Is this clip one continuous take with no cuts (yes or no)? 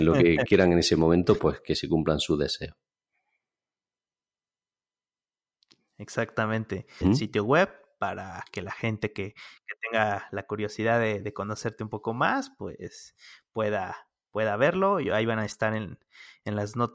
no